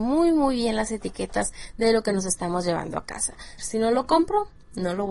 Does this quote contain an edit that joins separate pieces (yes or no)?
yes